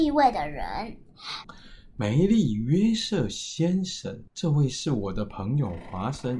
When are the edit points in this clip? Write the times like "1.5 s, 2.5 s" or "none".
1.4 s, 4.3 s